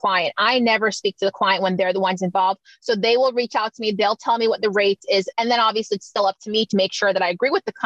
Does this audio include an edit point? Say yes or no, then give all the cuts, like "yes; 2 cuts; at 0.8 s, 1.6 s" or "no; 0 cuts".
yes; 2 cuts; at 5.3 s, 6.7 s